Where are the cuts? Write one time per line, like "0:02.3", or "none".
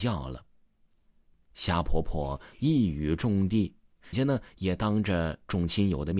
0:04.1